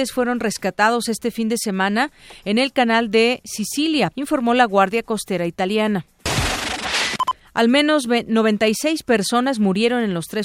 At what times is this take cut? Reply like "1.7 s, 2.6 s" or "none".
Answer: 4.1 s